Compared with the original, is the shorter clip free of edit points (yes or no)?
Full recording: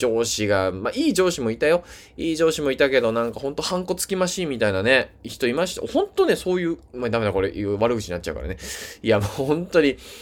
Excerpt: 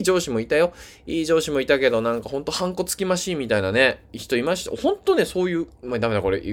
yes